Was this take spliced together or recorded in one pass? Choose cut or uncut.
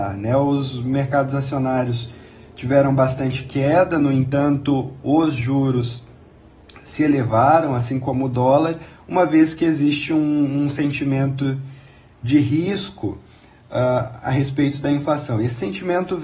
uncut